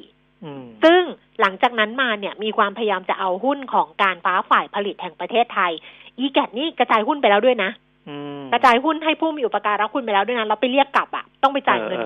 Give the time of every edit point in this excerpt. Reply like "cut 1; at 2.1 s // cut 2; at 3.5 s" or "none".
cut 1; at 4.2 s